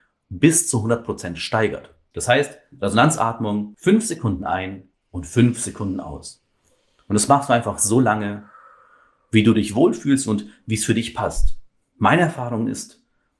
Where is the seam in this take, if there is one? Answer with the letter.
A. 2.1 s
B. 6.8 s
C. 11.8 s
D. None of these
A